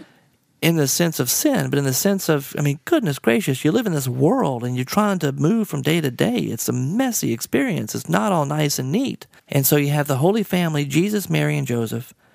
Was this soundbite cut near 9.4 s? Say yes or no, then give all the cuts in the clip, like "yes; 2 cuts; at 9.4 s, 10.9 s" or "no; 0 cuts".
yes; 1 cut; at 9.4 s